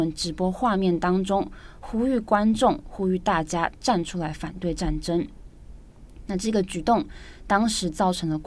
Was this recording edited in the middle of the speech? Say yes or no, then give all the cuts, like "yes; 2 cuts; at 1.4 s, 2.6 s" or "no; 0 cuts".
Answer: no; 0 cuts